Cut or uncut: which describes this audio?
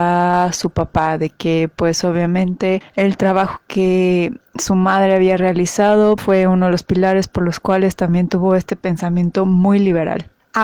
cut